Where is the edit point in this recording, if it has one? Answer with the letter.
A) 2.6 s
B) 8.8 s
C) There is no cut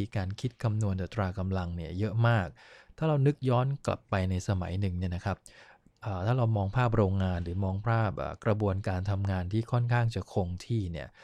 C